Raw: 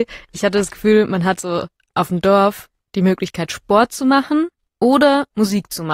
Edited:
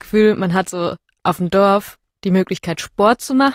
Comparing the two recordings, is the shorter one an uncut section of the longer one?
yes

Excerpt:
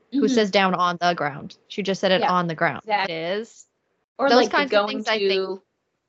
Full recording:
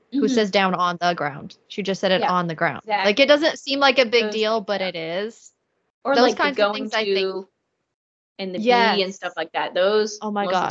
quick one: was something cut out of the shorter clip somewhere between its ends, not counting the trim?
yes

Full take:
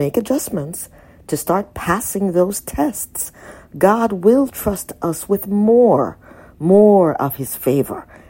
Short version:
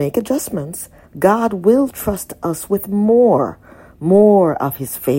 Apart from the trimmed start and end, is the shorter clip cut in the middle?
yes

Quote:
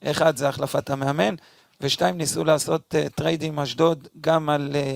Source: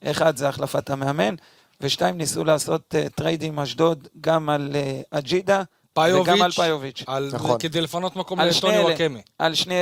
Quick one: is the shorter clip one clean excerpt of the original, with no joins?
yes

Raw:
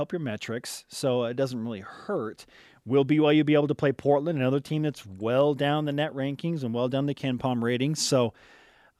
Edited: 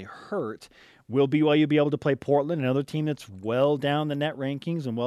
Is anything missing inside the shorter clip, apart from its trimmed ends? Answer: no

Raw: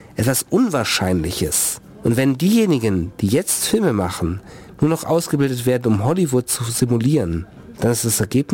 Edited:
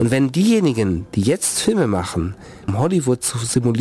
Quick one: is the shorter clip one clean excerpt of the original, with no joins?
no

